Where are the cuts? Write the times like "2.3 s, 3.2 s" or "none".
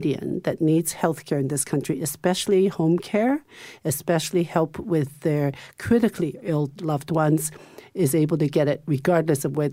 none